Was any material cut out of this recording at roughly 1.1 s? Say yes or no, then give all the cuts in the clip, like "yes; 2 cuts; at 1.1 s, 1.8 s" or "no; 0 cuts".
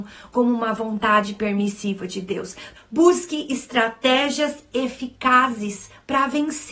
no; 1 cut; at 2.8 s